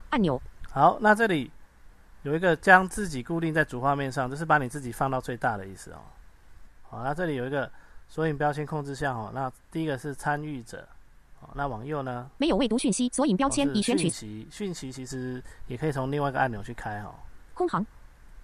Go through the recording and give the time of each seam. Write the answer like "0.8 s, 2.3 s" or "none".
6.7 s